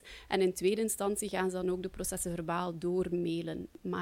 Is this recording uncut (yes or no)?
yes